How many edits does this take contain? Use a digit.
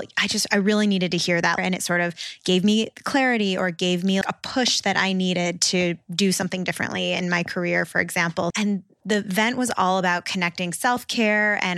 3